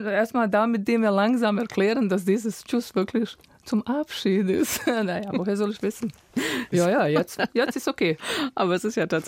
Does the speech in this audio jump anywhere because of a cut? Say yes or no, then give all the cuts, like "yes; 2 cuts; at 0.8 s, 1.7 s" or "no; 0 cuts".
yes; 1 cut; at 6.7 s